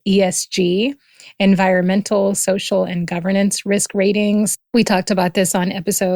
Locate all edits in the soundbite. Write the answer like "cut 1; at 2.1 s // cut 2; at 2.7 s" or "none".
none